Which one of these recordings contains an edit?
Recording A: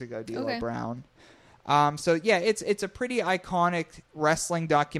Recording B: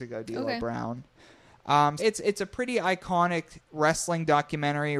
B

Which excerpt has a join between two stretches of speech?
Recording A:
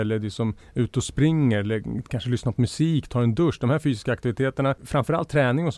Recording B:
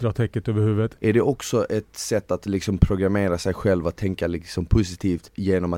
B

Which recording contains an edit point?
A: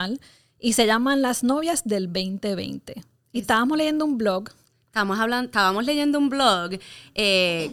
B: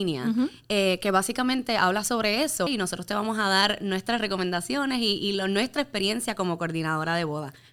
B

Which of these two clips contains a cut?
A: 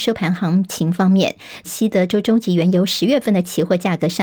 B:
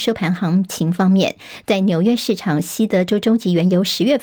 A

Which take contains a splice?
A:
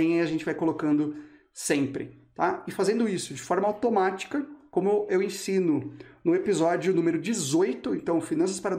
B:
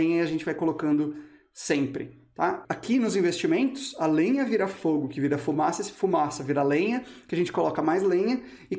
B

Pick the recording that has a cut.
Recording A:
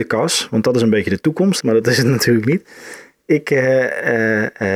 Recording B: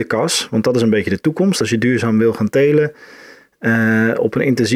A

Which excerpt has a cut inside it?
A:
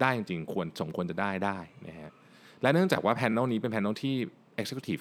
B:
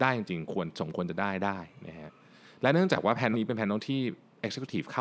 B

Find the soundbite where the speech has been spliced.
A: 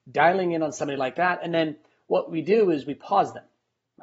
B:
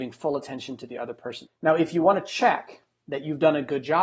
B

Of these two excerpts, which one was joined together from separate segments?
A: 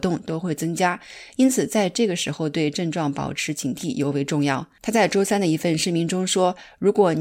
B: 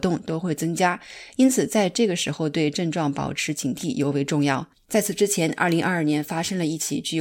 B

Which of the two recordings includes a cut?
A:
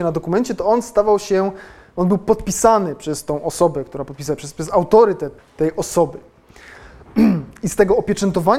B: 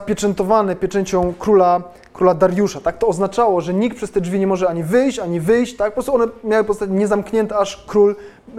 A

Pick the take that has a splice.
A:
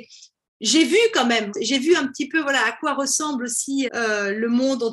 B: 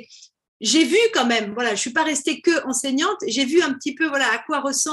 A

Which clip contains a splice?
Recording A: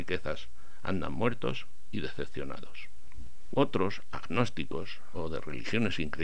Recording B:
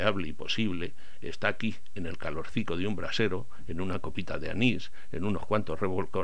A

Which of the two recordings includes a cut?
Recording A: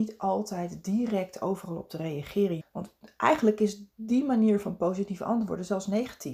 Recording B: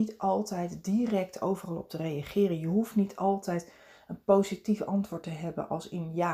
A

